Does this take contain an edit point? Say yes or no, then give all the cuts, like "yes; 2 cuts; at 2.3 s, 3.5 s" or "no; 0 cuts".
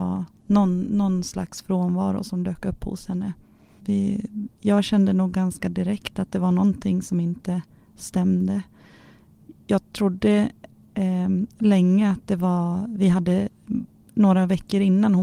yes; 1 cut; at 3.8 s